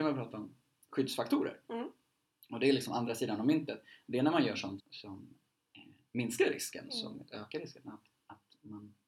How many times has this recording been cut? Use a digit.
1